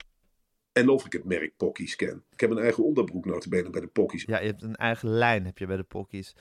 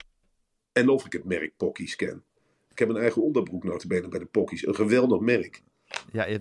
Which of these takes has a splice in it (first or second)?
first